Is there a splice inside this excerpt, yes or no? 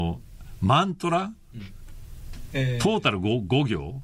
yes